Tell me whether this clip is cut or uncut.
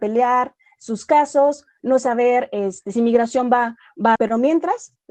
cut